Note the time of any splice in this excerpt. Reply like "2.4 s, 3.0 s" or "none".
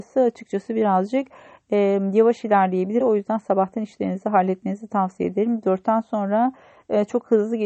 3.0 s

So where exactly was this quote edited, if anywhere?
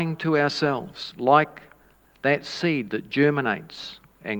none

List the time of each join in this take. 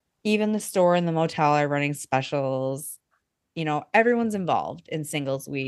none

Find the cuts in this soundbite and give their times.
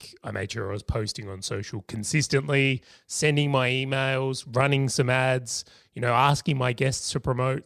none

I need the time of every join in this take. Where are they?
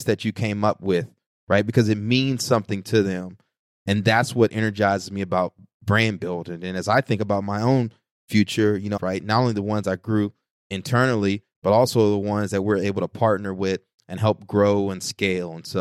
9.0 s

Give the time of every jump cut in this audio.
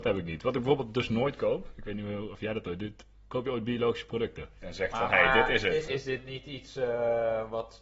4.6 s, 5.9 s

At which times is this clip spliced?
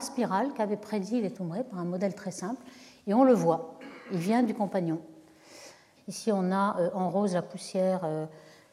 1.3 s, 6.0 s

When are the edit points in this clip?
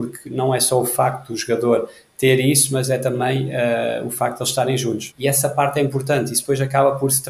5.1 s

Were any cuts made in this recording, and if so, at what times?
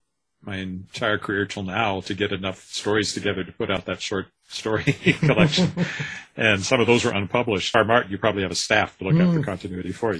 7.7 s

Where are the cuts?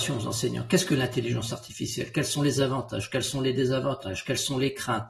none

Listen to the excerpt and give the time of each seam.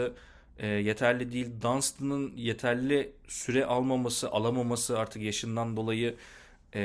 none

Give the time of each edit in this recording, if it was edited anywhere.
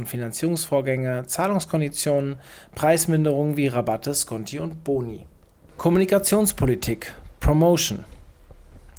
5.7 s

